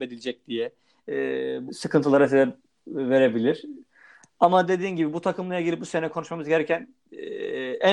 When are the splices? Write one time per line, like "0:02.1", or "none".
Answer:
0:01.7